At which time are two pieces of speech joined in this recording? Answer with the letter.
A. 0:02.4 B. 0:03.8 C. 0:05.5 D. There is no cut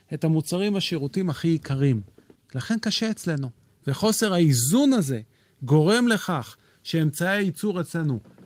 B